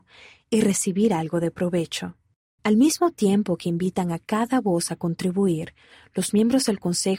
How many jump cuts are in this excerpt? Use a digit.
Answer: 1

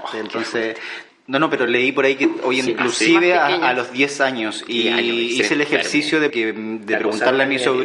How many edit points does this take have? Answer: 3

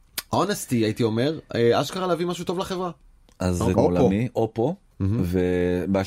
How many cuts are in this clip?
1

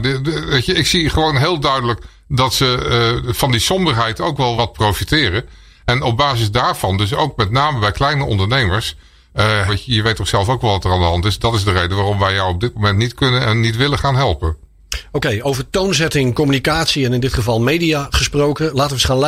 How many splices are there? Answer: 2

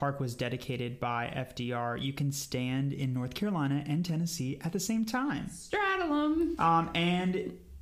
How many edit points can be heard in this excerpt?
1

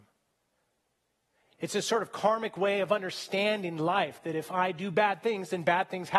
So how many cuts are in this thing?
1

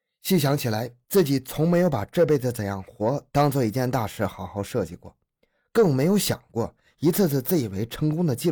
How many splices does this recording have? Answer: 0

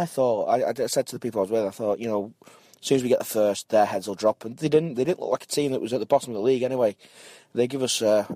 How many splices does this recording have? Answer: 0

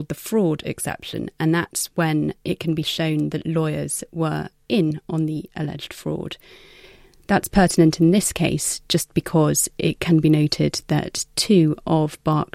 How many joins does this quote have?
0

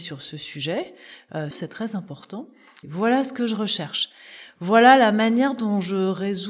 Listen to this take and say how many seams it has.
2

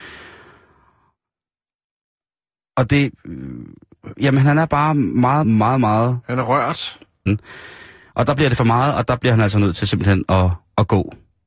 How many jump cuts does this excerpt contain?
2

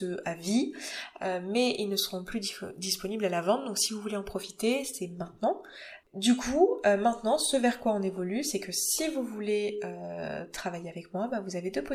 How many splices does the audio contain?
0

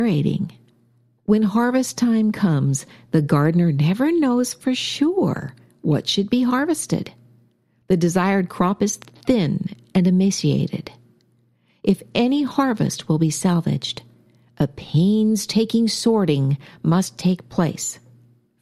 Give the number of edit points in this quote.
1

